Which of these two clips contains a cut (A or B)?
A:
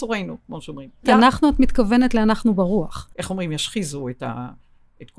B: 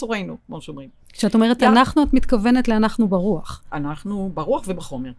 A